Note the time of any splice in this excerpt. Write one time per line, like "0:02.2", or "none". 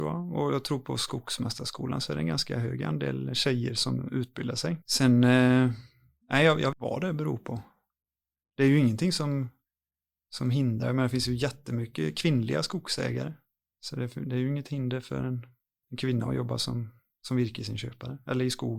0:04.8
0:06.7

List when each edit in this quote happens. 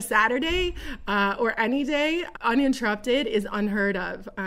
0:02.3

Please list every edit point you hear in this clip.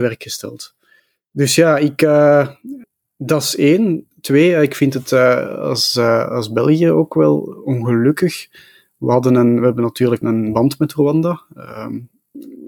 0:10.2

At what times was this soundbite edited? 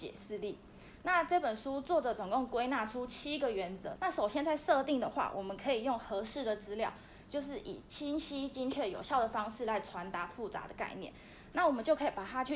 0:04.0
0:11.5

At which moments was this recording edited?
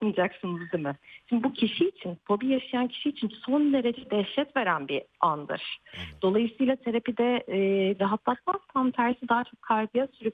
0:08.0

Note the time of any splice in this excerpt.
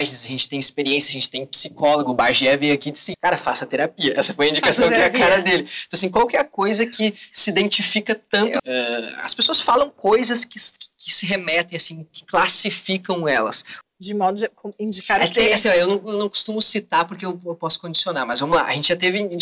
0:03.1
0:08.6
0:13.8

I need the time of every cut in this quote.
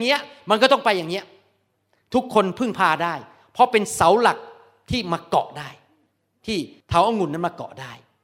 none

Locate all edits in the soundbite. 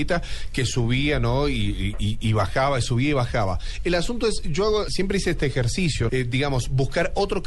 0:04.9
0:06.1

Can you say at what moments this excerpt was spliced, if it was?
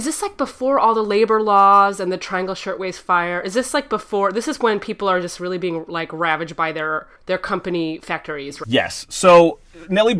0:07.2
0:08.6

